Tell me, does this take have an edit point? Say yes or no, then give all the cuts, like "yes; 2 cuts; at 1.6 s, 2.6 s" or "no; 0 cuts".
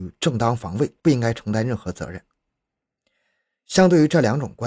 no; 0 cuts